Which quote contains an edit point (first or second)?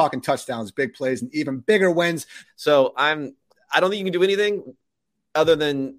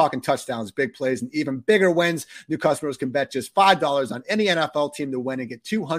first